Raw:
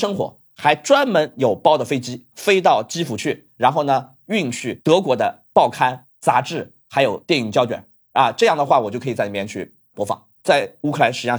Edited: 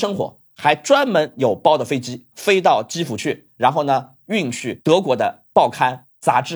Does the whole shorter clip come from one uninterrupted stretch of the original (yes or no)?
yes